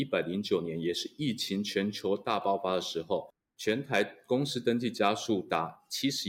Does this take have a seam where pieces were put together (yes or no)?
no